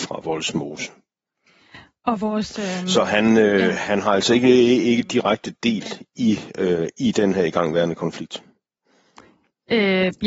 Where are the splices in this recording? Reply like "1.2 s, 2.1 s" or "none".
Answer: none